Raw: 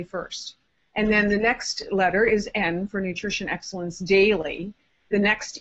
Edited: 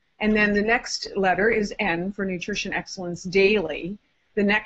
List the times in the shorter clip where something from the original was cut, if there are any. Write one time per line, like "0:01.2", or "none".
none